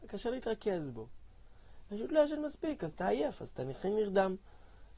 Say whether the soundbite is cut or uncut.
cut